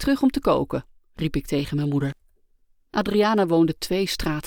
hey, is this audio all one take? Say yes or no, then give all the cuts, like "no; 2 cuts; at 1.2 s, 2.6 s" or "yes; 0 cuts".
yes; 0 cuts